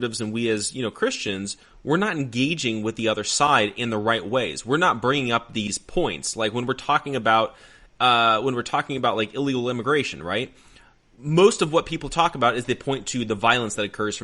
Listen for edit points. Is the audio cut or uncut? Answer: uncut